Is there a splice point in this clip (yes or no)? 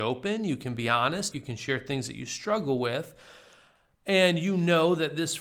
yes